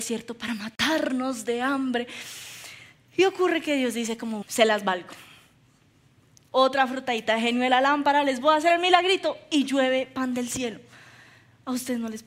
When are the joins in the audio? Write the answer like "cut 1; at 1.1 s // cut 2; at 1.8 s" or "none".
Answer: cut 1; at 4.4 s